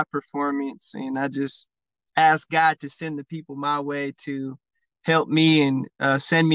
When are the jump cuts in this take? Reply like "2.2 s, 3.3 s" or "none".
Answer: none